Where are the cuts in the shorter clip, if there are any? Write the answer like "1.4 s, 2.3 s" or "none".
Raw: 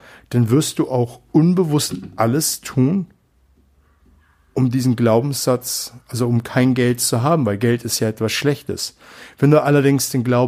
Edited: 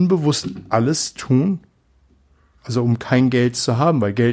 2.6 s

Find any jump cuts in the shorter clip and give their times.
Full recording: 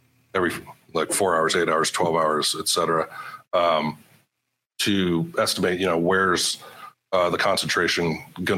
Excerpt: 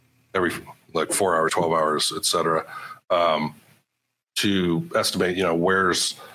1.5 s

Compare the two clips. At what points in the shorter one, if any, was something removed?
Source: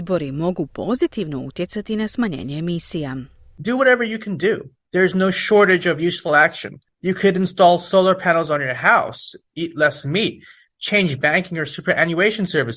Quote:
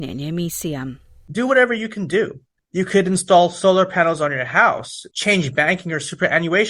2.6 s, 5.1 s

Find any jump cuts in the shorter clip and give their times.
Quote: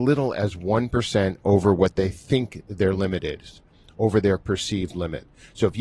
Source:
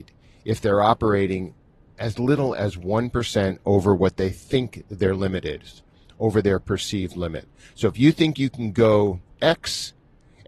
none

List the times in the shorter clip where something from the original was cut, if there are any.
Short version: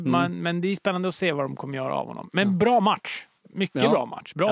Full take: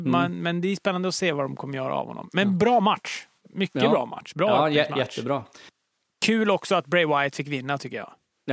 none

